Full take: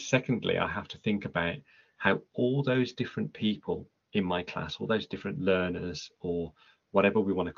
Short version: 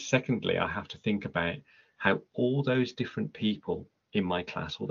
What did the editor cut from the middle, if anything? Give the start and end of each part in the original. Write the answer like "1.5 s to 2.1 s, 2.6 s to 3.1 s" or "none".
none